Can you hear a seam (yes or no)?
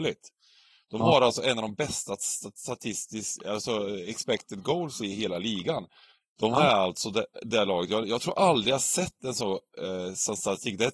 yes